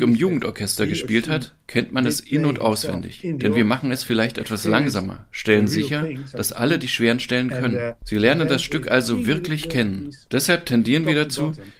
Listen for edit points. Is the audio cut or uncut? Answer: uncut